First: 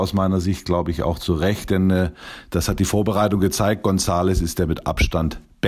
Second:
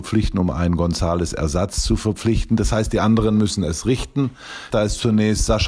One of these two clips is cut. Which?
second; 1 cut; at 4.7 s

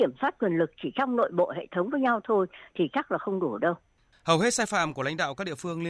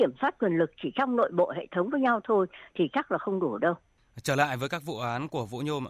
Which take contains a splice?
first; 1 cut; at 4.1 s

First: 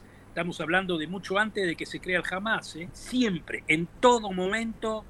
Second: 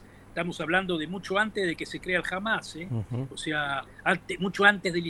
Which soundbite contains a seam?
first; 1 cut; at 2.9 s

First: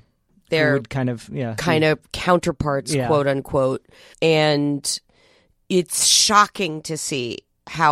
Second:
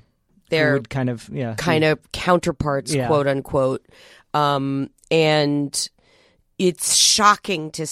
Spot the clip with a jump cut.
first; 1 cut; at 4.1 s

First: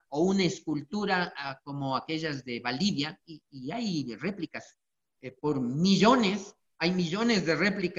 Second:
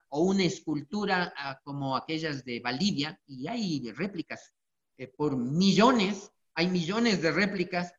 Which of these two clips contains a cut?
second; 1 cut; at 3.2 s

